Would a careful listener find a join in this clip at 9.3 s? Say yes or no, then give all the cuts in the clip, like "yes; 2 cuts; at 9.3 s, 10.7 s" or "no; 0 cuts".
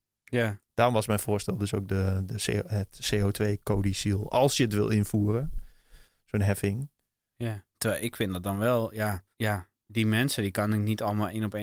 yes; 2 cuts; at 7.7 s, 9.3 s